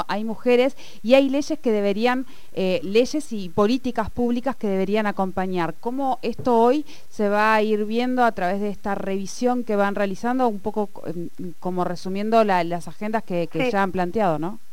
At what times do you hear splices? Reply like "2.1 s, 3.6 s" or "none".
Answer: none